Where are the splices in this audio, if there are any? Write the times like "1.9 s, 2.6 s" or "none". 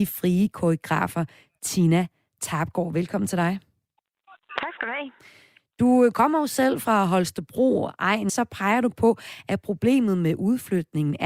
8.3 s

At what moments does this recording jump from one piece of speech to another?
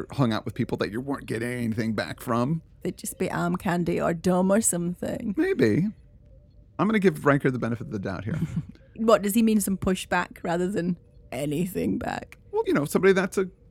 2.8 s, 12.6 s

